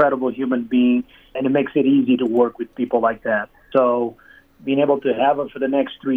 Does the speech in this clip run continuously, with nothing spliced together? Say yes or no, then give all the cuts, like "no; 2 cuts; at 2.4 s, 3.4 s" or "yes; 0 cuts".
no; 2 cuts; at 1.4 s, 3.7 s